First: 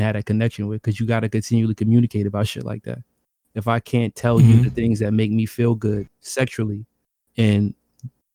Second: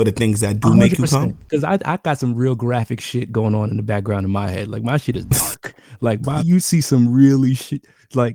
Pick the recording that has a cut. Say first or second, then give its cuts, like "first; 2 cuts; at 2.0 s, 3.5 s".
second; 1 cut; at 6.4 s